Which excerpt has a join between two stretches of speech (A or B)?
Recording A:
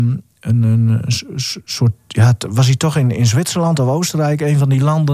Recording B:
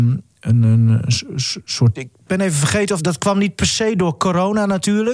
B